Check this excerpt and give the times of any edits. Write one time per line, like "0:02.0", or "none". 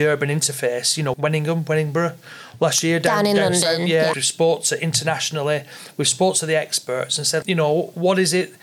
0:01.1
0:04.1
0:07.4

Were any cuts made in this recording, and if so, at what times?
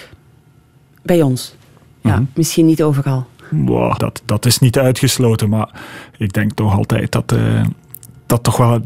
0:04.0

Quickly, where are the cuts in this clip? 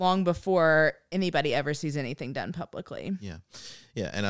none

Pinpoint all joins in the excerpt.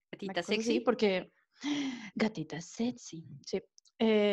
none

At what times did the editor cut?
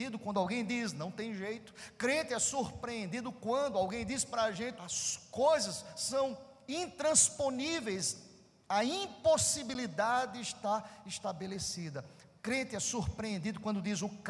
0:04.8
0:12.4

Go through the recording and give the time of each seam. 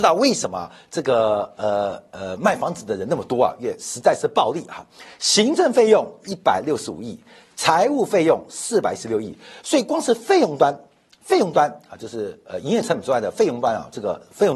none

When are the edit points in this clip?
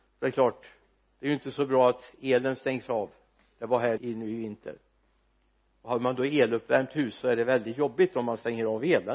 0:04.0

